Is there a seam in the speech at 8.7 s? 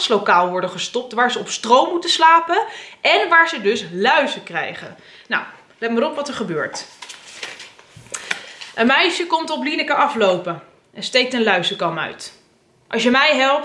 no; 0 cuts

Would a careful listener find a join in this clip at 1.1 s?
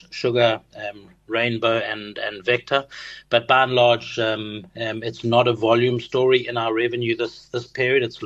no; 0 cuts

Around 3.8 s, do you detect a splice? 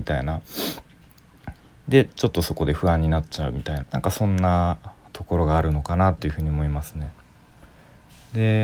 yes; 1 cut; at 3.8 s

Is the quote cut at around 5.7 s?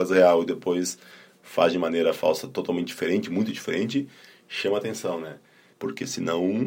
yes; 1 cut; at 5.7 s

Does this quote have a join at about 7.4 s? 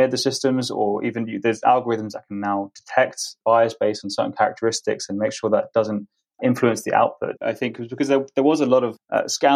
yes; 1 cut; at 7.4 s

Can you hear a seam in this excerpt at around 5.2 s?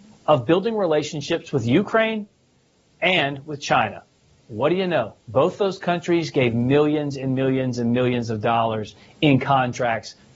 yes; 1 cut; at 5.2 s

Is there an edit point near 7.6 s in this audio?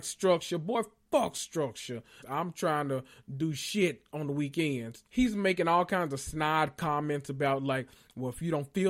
no; 2 cuts; at 2.2 s, 5.1 s

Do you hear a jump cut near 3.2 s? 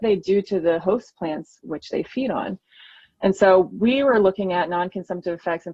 no; 0 cuts

